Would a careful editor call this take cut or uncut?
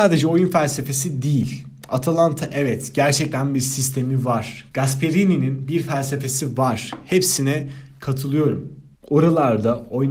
cut